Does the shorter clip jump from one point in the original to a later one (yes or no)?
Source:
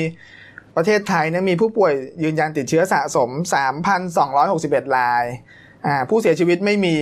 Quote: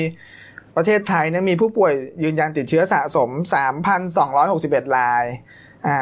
no